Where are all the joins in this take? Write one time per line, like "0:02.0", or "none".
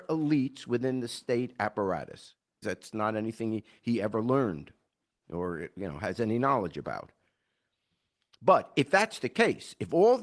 0:02.6